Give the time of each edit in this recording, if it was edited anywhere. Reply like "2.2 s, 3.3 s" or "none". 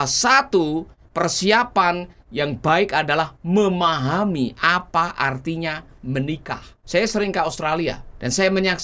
6.8 s